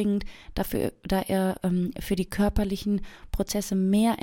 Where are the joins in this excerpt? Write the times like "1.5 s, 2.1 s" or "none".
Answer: none

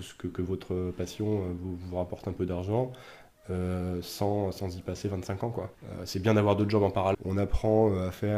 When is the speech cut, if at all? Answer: 5.7 s, 7.1 s

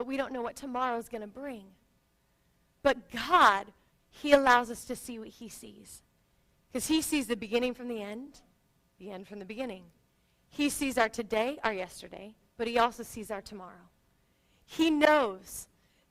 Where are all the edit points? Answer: 3.9 s

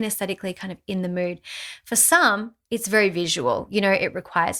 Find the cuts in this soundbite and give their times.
none

